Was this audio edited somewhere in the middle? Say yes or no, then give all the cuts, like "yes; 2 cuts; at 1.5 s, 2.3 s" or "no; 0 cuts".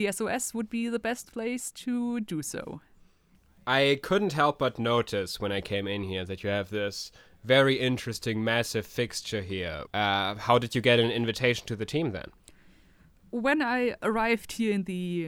yes; 1 cut; at 9.9 s